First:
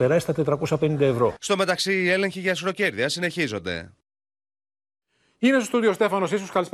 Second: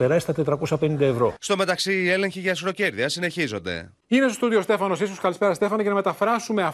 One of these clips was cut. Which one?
second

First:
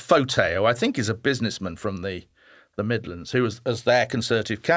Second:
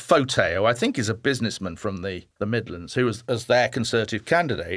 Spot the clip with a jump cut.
second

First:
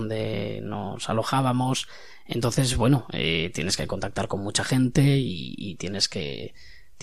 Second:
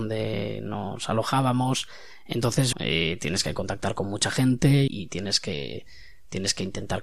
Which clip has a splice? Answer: second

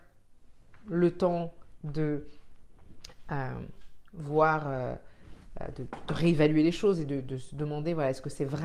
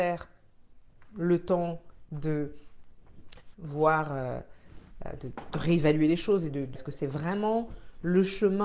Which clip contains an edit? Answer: second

